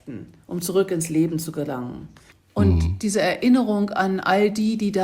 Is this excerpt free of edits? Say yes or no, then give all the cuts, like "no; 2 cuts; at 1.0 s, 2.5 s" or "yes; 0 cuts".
no; 1 cut; at 2.3 s